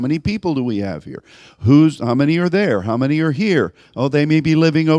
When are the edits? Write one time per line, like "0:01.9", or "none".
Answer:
none